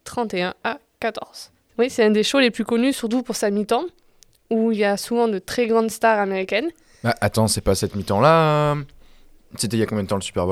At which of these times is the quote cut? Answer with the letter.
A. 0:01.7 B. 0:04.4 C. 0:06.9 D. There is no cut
A